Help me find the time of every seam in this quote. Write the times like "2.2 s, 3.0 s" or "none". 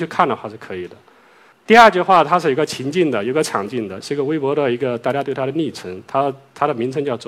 1.5 s, 4.0 s